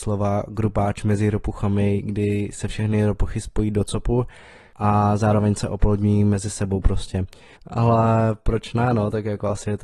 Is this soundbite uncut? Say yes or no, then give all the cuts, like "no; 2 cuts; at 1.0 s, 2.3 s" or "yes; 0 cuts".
no; 1 cut; at 7.6 s